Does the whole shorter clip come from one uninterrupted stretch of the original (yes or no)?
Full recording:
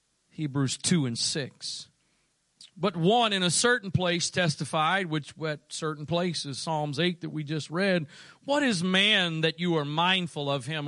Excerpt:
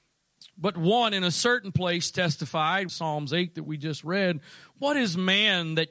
no